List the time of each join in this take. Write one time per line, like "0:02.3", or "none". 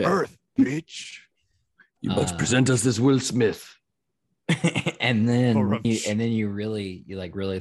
0:05.8